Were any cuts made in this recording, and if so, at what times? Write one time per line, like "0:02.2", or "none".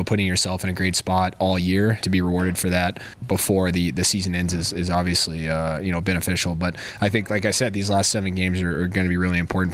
0:02.0

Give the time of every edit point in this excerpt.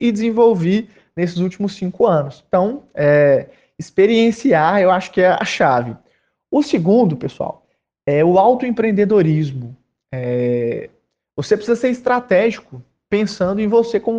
none

